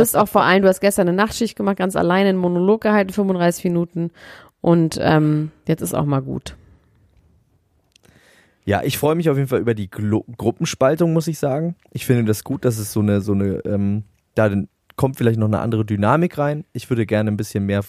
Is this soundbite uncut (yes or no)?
yes